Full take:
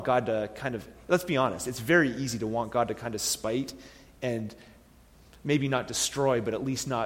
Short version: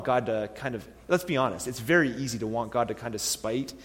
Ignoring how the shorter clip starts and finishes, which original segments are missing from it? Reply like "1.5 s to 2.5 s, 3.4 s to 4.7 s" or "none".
none